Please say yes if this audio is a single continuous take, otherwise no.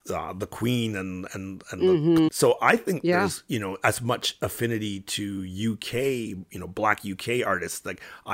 no